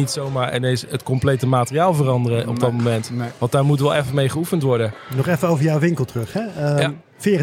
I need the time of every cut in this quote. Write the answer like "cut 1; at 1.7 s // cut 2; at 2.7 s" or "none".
none